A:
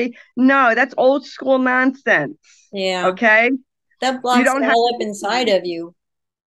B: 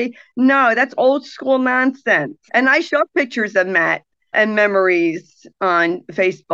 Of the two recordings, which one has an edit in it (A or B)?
B